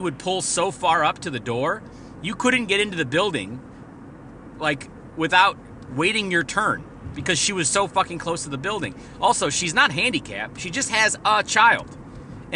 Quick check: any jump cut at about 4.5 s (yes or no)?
no